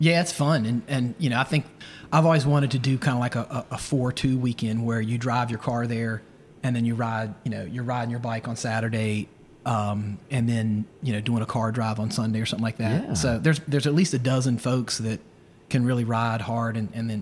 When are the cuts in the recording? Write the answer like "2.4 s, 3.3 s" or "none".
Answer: none